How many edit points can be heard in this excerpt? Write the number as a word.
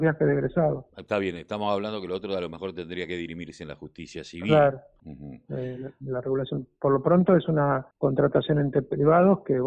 two